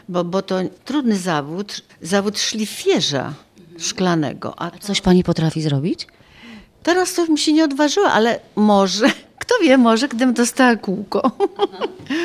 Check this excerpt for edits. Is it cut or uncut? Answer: uncut